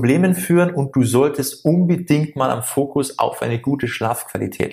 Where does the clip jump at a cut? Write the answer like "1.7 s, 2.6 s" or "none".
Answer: none